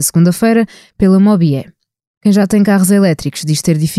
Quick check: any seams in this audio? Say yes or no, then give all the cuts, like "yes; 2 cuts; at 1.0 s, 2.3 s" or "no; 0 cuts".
no; 0 cuts